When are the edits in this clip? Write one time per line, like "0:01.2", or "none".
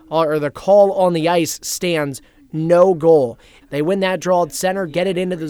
0:03.6